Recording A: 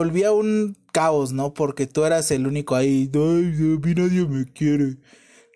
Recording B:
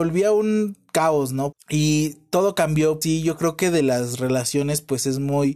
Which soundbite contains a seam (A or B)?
B